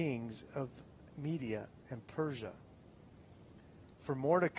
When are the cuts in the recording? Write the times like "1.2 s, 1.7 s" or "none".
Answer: 1.1 s